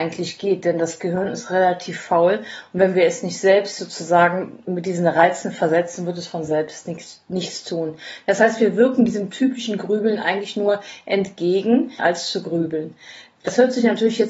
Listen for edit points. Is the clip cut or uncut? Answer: cut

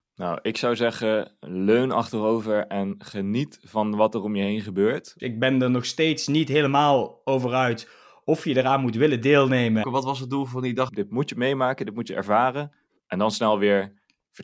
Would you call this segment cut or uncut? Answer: cut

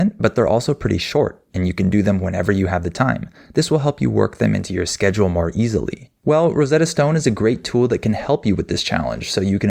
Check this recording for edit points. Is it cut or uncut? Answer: cut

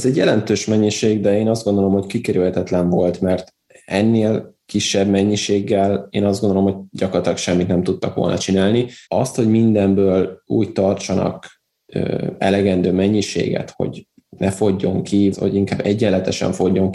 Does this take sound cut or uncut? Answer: cut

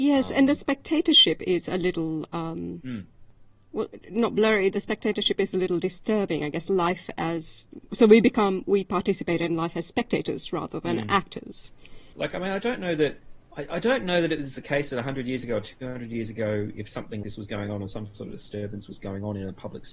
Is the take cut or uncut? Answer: cut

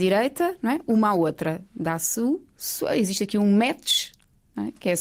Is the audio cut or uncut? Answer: uncut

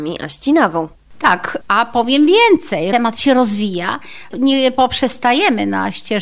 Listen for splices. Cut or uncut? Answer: uncut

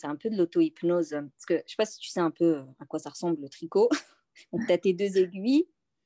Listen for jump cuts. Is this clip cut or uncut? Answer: uncut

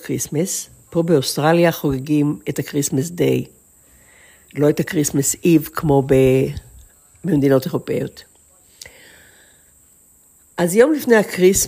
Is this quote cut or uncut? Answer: uncut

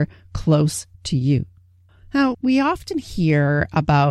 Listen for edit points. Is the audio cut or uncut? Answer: cut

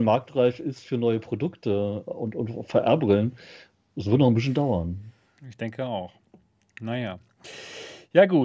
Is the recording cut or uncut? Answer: uncut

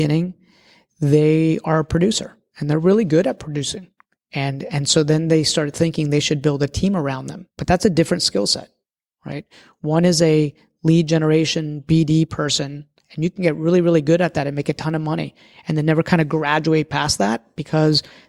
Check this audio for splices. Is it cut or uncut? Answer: uncut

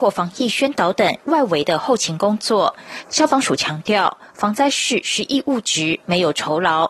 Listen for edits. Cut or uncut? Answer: cut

